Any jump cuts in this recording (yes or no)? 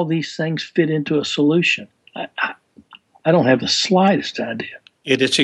no